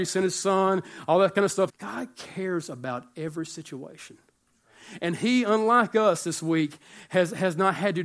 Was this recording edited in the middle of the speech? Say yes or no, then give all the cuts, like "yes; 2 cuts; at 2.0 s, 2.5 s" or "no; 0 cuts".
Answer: yes; 1 cut; at 1.7 s